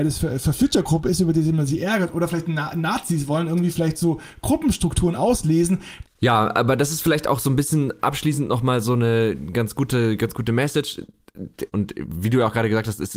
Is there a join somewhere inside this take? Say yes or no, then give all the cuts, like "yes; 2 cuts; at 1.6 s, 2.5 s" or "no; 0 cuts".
yes; 2 cuts; at 6.0 s, 11.7 s